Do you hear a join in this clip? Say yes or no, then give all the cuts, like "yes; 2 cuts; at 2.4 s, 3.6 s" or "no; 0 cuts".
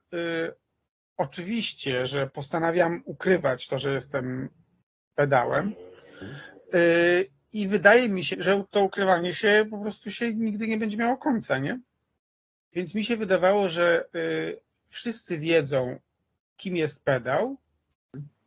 yes; 2 cuts; at 8.3 s, 12.6 s